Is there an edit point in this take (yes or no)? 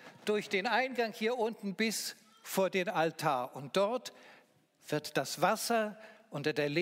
no